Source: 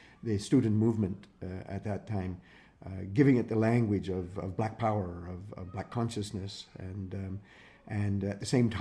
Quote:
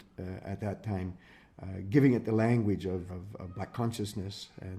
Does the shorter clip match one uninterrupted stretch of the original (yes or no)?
no